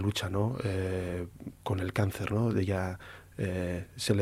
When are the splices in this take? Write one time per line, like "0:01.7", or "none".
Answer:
none